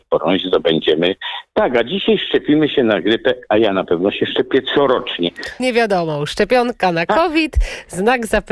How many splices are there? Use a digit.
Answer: 1